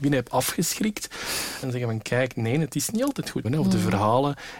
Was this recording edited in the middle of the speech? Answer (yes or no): yes